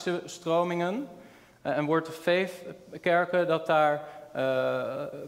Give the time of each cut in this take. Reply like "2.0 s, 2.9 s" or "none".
none